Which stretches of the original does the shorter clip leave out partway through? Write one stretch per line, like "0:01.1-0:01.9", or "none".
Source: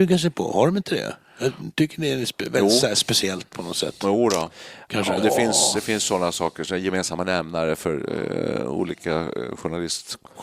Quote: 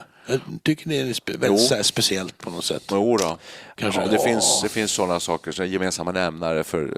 none